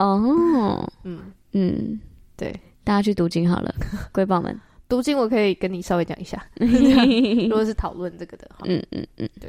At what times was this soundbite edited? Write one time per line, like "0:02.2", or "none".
none